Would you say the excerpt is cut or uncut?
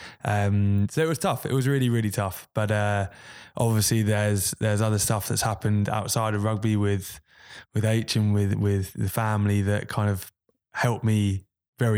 uncut